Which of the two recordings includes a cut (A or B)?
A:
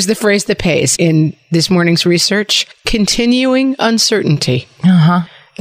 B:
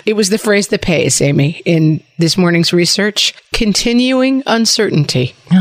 A